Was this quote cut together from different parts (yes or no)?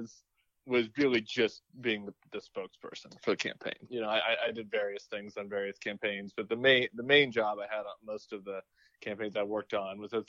no